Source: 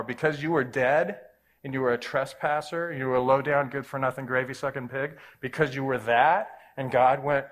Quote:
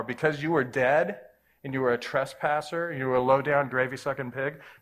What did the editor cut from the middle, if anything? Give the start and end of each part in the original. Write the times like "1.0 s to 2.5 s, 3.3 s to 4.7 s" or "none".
3.7 s to 4.3 s